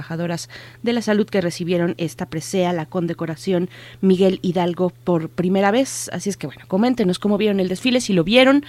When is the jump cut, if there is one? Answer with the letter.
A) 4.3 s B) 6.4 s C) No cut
C